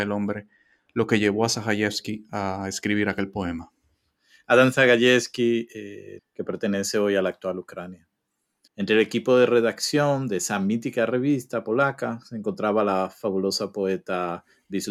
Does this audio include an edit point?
yes; 2 cuts; at 6.2 s, 8.7 s

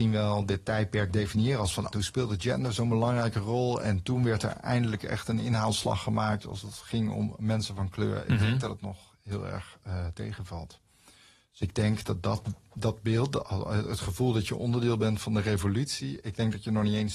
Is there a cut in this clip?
yes; 1 cut; at 1.9 s

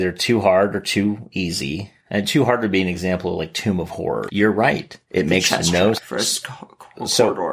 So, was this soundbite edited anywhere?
yes; 2 cuts; at 4.3 s, 5.9 s

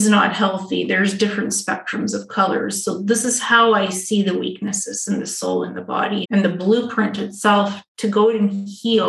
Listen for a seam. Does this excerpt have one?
yes; 1 cut; at 6.2 s

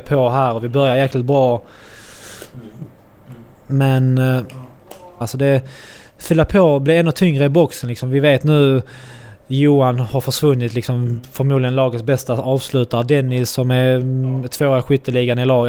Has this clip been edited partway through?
yes; 1 cut; at 5.2 s

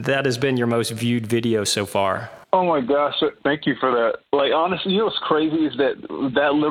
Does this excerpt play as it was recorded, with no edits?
no; 1 cut; at 2.4 s

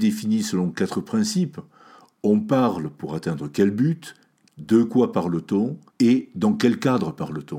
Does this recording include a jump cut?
yes; 2 cuts; at 4.5 s, 5.9 s

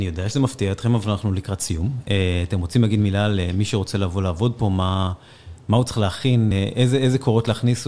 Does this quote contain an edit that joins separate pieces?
no; 0 cuts

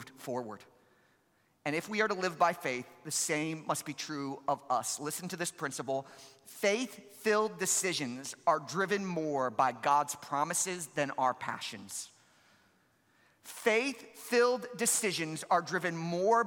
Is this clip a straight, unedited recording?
yes; 0 cuts

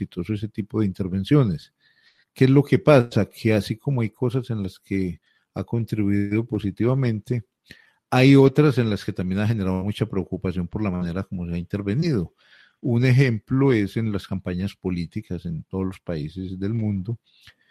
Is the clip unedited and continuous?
yes; 0 cuts

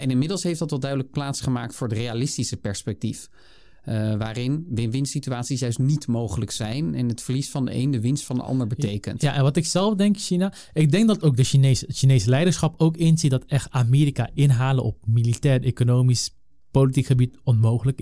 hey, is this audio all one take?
yes; 0 cuts

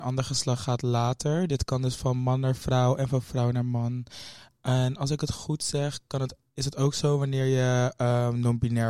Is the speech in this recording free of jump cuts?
yes; 0 cuts

